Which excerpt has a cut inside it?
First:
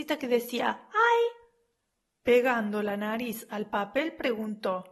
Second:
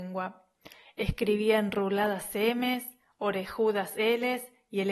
first; 1 cut; at 2.1 s

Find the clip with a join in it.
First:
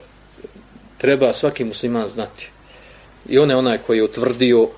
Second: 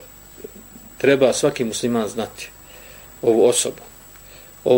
first; 1 cut; at 3.2 s

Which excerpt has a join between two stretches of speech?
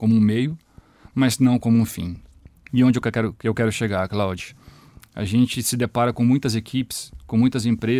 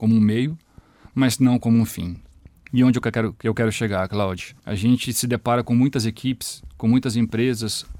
second; 1 cut; at 4.6 s

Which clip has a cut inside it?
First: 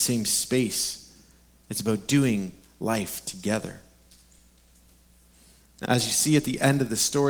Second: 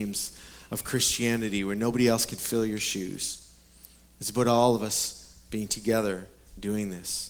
first; 1 cut; at 5.8 s

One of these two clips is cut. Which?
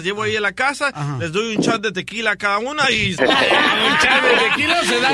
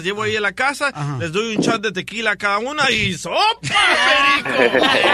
first; 1 cut; at 3.2 s

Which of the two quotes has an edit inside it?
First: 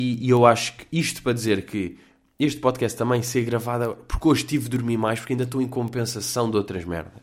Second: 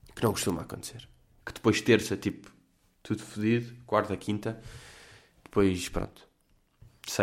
second; 1 cut; at 1.4 s

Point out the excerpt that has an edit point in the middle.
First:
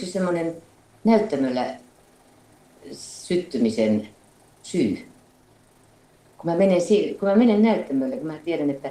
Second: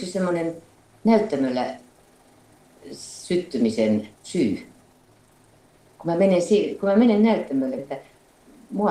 second; 2 cuts; at 4.1 s, 7.8 s

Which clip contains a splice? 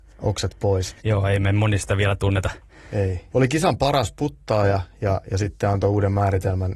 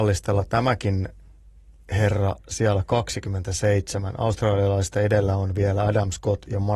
first; 2 cuts; at 1.0 s, 3.3 s

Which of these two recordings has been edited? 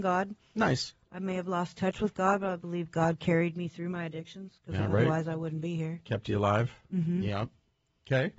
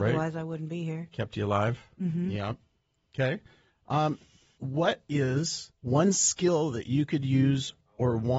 second; 2 cuts; at 4.6 s, 5.8 s

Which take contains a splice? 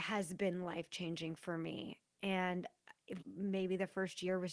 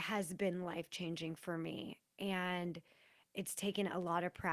first; 2 cuts; at 2.1 s, 3.2 s

